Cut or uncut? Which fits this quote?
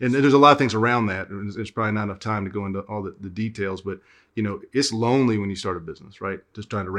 uncut